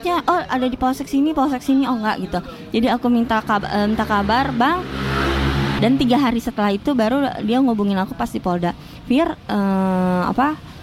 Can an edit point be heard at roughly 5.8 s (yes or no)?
yes